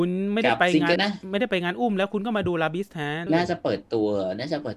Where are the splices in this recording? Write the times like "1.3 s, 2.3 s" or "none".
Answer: 1.0 s, 3.3 s